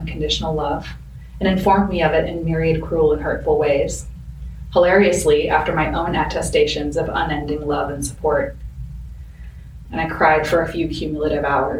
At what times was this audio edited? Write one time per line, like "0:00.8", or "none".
0:09.8